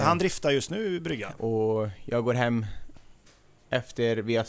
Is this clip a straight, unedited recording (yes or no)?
no